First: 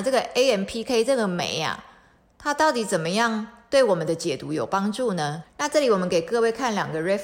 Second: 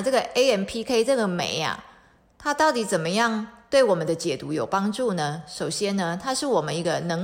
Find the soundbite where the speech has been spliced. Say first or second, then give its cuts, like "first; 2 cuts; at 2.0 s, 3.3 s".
first; 1 cut; at 5.4 s